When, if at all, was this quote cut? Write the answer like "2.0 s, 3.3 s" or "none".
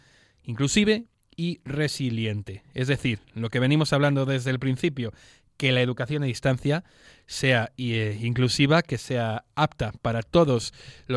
none